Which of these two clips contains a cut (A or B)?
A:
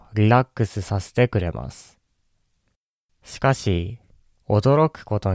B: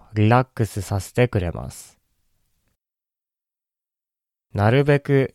A